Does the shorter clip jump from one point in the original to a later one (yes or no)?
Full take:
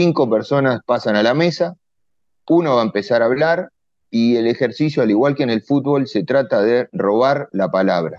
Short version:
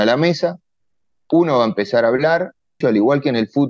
yes